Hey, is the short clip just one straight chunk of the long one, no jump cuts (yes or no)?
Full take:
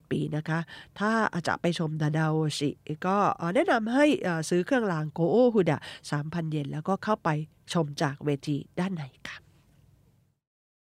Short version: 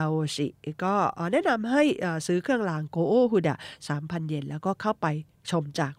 yes